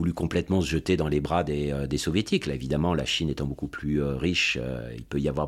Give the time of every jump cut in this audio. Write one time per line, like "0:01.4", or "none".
none